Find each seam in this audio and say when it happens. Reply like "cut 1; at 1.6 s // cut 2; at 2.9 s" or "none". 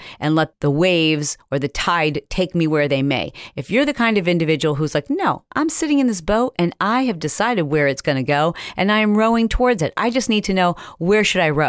none